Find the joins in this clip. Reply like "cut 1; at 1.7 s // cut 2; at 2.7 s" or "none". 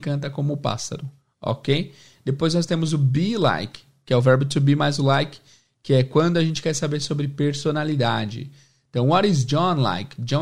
none

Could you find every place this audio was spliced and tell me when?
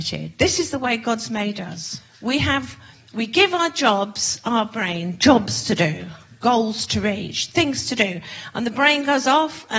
none

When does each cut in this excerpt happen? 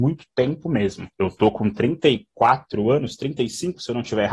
none

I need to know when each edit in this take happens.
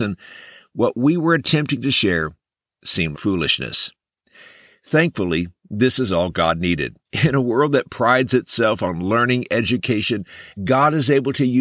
cut 1; at 3.1 s // cut 2; at 7.0 s // cut 3; at 10.6 s

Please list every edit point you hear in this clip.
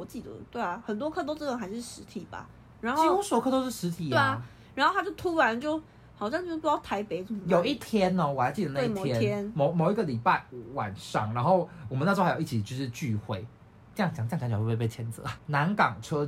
cut 1; at 15.4 s

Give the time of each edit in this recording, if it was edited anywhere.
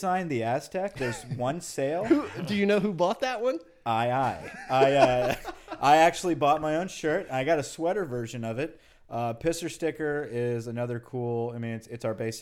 none

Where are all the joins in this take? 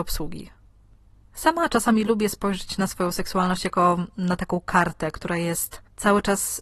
none

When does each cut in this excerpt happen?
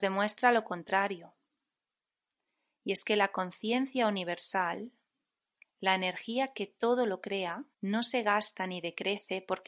cut 1; at 5.6 s // cut 2; at 7.7 s

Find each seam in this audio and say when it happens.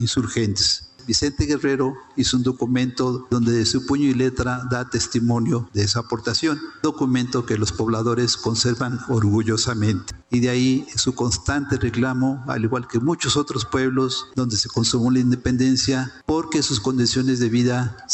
cut 1; at 14.3 s

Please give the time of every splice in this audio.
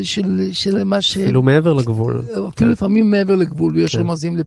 none

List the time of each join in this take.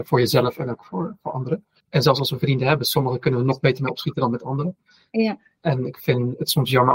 cut 1; at 1.8 s

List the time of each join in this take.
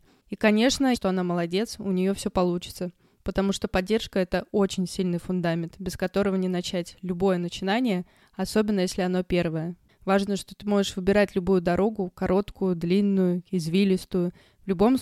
cut 1; at 0.9 s // cut 2; at 9.9 s

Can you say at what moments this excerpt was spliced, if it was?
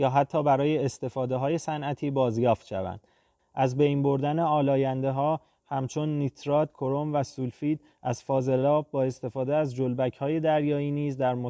cut 1; at 3.4 s // cut 2; at 6.7 s

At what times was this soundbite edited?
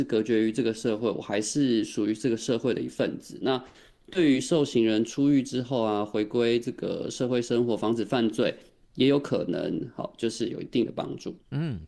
none

